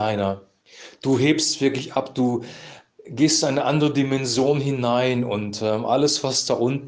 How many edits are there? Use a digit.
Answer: 0